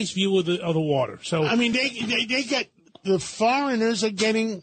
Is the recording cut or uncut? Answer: uncut